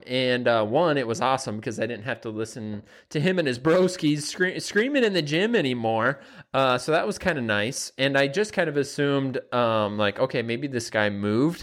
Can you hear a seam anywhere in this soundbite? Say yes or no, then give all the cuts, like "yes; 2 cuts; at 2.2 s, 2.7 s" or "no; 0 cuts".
no; 0 cuts